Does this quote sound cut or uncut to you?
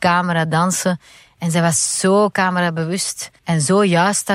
cut